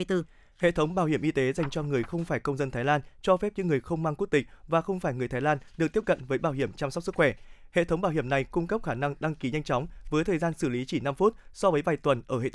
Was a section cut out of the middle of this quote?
no; 0 cuts

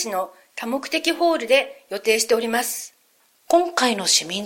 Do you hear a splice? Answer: no; 0 cuts

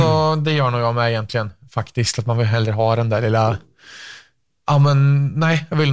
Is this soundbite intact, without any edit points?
yes; 0 cuts

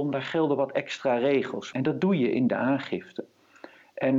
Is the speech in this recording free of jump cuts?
no; 1 cut; at 1.7 s

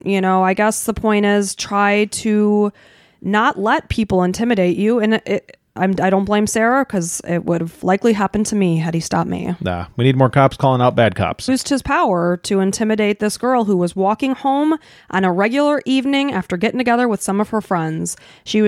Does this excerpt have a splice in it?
yes; 2 cuts; at 5.8 s, 11.5 s

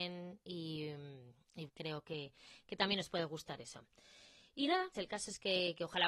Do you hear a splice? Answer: yes; 2 cuts; at 1.7 s, 4.9 s

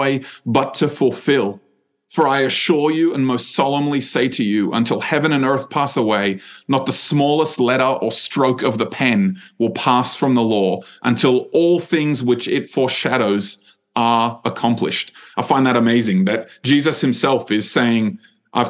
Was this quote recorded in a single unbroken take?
yes; 0 cuts

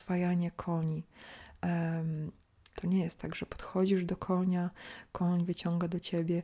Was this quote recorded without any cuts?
no; 1 cut; at 2.7 s

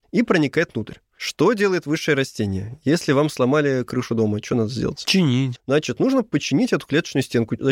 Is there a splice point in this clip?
yes; 1 cut; at 5.6 s

